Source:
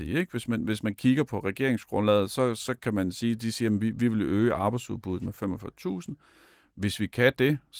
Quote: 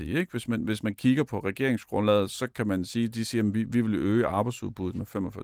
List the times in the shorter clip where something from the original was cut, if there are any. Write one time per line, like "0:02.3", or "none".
0:02.3